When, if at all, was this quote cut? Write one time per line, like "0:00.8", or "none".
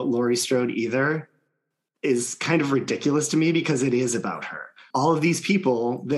0:04.9